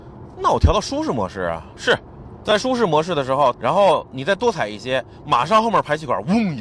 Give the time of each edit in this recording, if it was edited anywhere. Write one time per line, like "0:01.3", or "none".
0:02.4
0:03.5